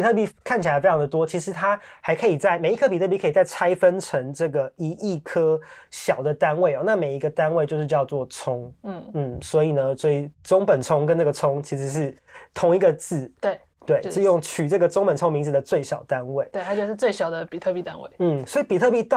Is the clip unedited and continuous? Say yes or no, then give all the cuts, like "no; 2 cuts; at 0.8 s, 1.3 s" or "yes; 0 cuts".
yes; 0 cuts